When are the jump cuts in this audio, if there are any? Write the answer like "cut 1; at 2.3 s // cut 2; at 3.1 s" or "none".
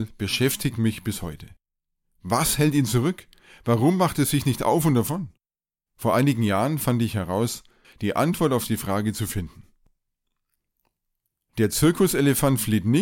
cut 1; at 5.9 s // cut 2; at 7.8 s

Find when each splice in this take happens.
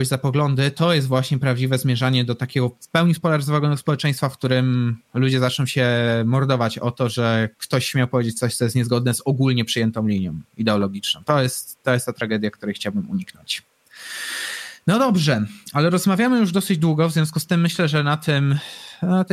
none

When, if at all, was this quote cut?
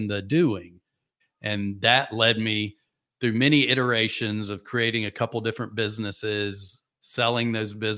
cut 1; at 1.2 s // cut 2; at 6.9 s

